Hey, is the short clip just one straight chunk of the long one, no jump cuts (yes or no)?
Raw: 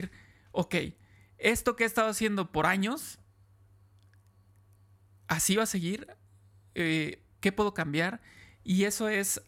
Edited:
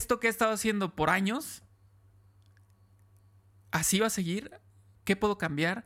no